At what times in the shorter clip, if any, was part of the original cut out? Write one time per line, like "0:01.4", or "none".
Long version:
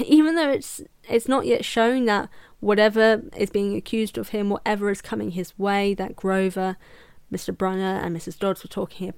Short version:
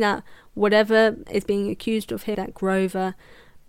0:02.3